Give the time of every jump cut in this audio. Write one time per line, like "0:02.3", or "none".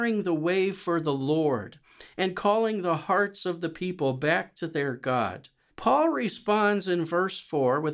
0:05.7

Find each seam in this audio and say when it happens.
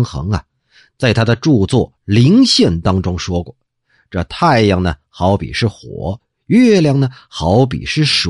none

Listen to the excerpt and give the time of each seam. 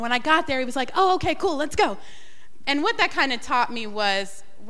0:02.6

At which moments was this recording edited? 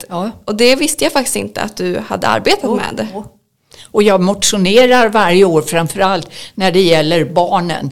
none

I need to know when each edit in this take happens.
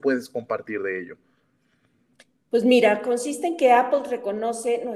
none

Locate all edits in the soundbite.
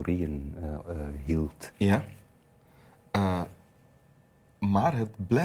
0:01.7

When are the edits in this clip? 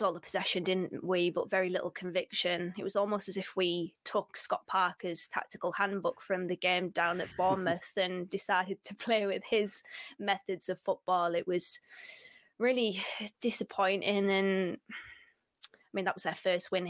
none

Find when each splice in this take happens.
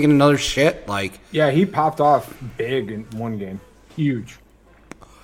0:03.9

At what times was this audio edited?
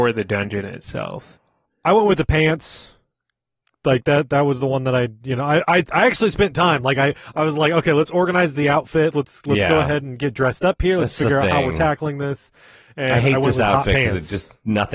0:09.1

